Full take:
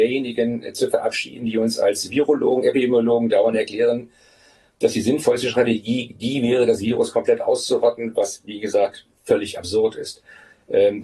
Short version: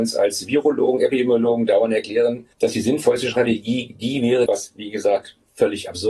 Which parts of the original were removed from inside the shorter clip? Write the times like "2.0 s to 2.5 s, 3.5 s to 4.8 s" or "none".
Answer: 4.2 s to 4.7 s, 6.7 s to 8.2 s